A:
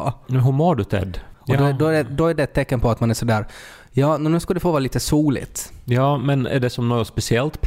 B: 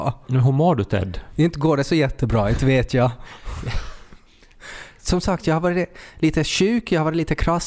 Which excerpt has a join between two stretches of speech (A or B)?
A